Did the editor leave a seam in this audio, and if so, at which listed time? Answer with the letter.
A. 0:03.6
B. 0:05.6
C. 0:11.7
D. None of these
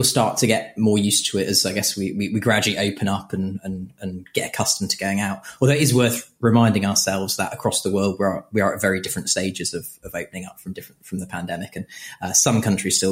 D